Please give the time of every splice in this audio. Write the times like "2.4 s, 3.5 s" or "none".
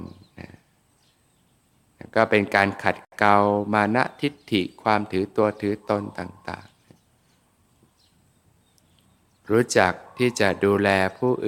none